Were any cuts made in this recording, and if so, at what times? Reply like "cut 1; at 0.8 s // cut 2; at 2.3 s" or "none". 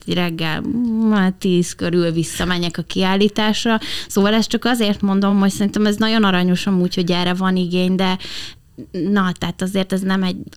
none